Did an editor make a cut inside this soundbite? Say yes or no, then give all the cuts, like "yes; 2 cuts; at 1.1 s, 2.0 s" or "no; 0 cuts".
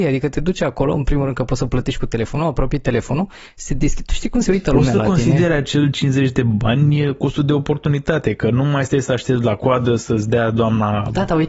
no; 0 cuts